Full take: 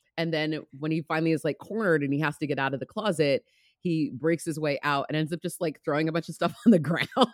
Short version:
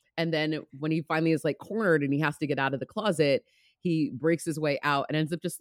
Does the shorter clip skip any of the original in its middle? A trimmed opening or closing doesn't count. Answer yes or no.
no